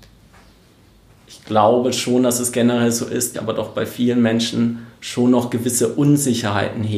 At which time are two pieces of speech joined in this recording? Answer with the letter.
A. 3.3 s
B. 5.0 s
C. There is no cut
A